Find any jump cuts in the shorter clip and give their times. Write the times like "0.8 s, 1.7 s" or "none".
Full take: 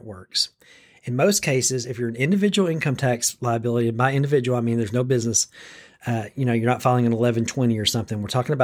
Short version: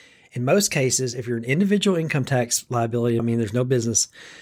3.2 s

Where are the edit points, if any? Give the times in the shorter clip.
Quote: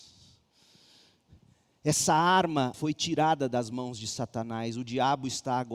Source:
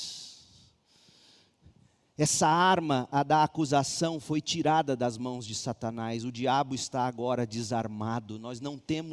2.7 s

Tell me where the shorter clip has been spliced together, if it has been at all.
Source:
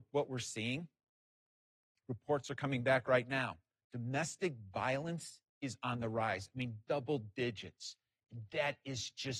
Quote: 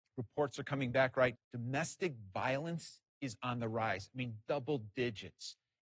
1.3 s

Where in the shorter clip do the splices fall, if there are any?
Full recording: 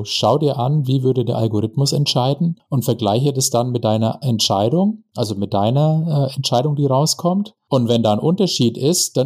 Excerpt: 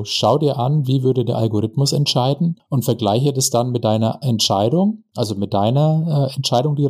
none

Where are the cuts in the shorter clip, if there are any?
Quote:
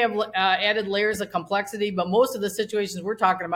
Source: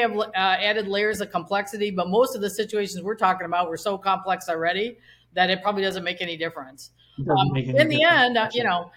none

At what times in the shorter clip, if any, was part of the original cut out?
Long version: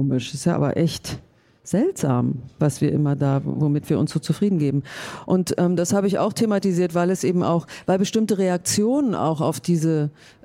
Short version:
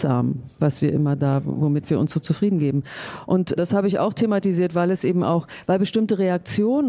3.6 s

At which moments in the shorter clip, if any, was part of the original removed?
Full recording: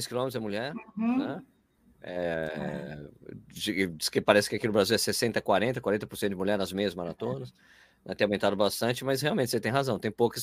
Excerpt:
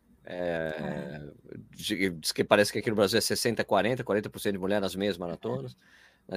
none

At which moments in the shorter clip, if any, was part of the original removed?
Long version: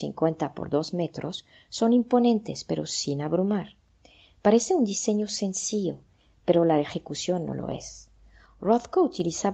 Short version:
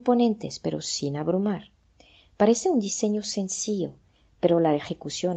none

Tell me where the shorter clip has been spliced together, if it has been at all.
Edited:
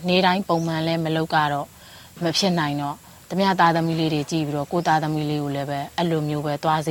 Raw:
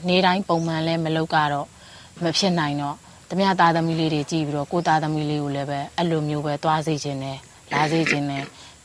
none

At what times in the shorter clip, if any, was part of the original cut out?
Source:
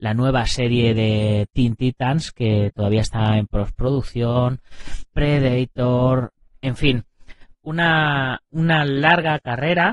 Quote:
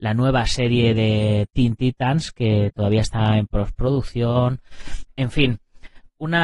5.1 s

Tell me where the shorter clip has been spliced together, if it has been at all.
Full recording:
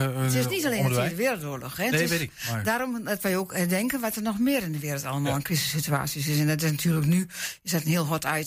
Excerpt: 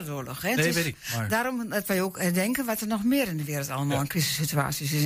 none

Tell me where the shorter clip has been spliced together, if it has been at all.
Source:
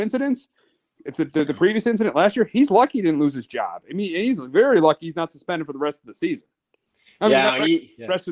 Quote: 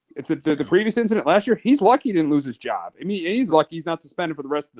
3.5 s

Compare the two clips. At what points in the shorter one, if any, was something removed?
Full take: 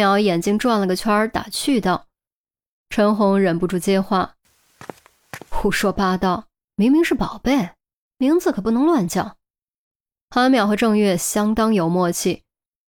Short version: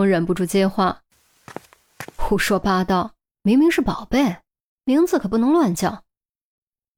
none

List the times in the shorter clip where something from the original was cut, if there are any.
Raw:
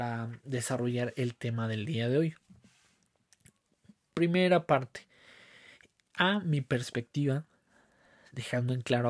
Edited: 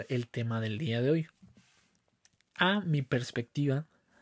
2.4 s

